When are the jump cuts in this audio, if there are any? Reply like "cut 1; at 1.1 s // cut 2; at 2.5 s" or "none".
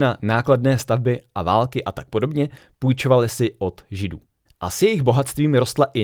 cut 1; at 4.5 s